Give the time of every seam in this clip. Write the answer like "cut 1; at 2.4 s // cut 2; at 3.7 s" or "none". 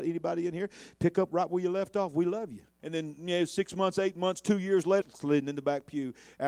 cut 1; at 2.8 s // cut 2; at 5.0 s